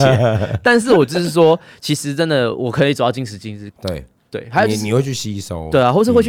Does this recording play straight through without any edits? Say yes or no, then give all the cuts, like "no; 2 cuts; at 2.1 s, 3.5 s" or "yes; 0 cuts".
no; 1 cut; at 3.7 s